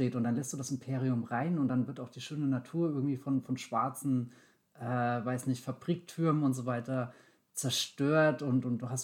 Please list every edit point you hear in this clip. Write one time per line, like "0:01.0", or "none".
none